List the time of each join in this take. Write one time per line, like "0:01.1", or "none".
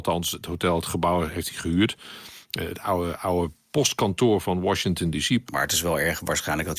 0:05.5